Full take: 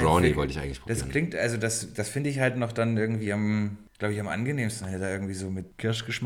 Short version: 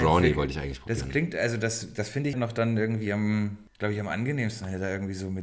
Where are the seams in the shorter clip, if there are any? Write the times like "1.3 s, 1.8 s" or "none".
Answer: 2.3 s